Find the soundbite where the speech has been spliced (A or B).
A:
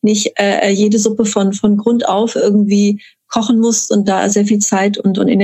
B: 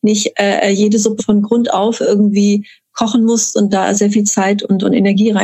B